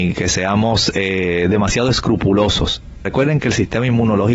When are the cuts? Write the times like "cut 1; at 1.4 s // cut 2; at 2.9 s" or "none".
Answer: cut 1; at 3.0 s

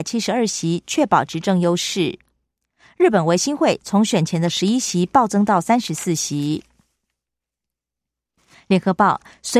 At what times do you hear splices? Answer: none

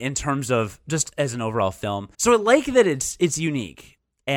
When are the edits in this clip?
cut 1; at 2.1 s

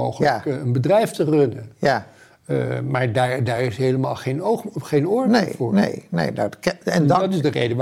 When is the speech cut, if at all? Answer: none

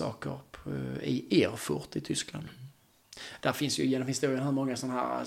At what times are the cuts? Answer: none

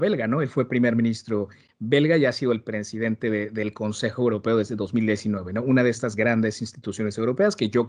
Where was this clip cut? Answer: none

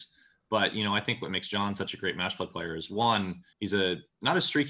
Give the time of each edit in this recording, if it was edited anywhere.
cut 1; at 3.5 s

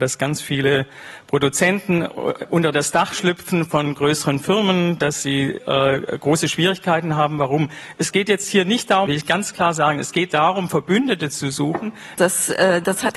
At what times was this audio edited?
cut 1; at 9.1 s // cut 2; at 12.2 s

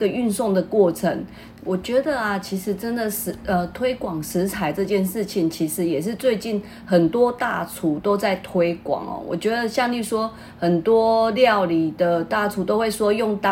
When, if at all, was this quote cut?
cut 1; at 1.5 s

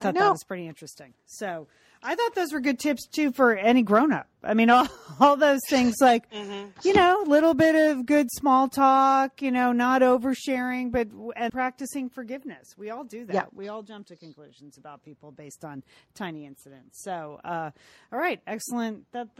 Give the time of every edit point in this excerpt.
cut 1; at 11.5 s

